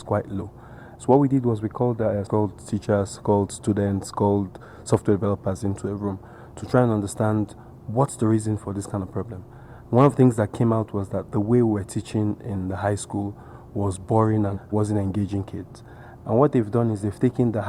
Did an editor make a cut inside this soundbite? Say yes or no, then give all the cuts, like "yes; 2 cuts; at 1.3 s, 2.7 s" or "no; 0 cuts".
yes; 1 cut; at 2.3 s